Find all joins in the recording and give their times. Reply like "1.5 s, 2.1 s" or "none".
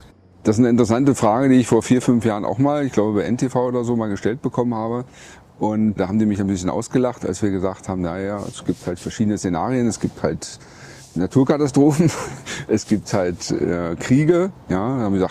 6.0 s